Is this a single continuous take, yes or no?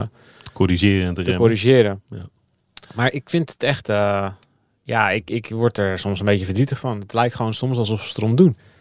yes